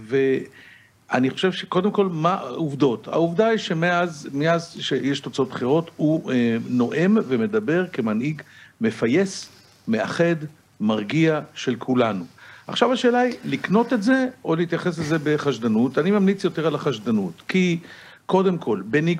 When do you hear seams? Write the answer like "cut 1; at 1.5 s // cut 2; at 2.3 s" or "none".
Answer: none